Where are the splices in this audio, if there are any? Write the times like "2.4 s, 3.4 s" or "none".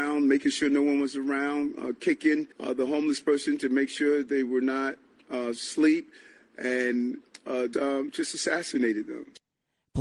2.5 s, 7.7 s